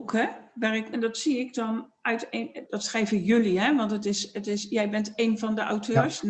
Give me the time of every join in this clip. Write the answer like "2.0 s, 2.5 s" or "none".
2.7 s